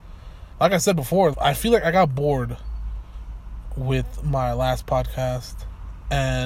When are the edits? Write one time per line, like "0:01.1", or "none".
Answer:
0:01.3